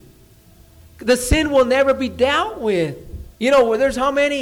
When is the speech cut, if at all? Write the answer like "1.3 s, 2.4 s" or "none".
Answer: 3.3 s